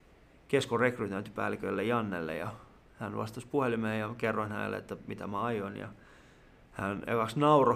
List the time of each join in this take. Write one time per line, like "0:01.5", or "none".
0:02.9